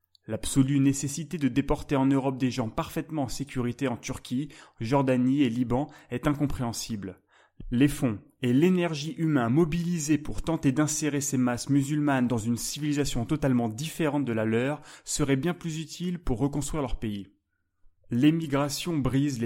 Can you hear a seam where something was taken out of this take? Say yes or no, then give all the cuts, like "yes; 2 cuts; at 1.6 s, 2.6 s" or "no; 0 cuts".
no; 0 cuts